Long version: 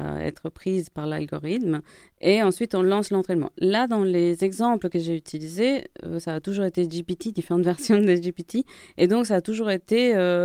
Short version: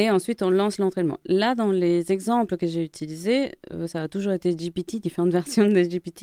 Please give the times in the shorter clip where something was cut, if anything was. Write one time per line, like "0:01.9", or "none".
none